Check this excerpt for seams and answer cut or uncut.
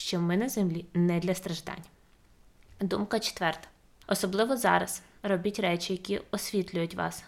uncut